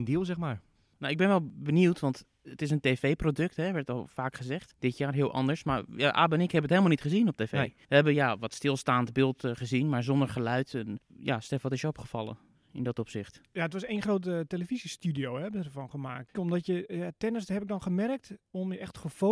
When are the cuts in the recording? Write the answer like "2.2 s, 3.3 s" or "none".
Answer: 16.3 s